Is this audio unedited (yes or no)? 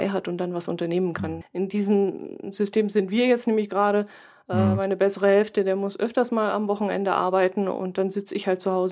no